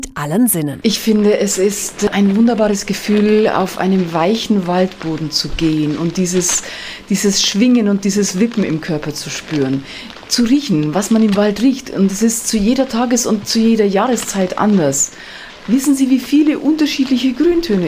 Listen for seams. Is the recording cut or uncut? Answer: uncut